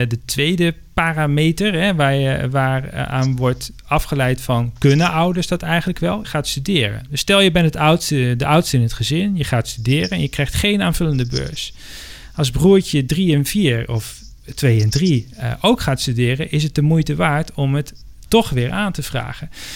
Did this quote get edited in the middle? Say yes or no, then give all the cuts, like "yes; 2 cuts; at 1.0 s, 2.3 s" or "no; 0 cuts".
yes; 1 cut; at 6.2 s